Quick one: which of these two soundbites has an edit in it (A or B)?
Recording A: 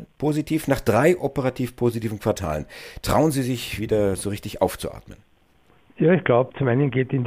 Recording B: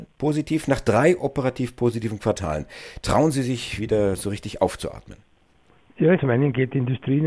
B